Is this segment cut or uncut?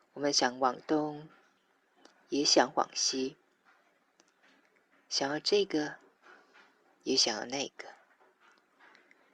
uncut